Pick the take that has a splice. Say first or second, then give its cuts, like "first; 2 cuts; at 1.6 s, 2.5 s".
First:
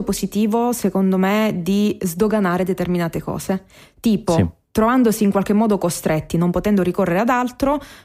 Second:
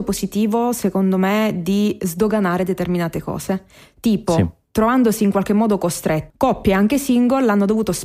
second; 1 cut; at 6.3 s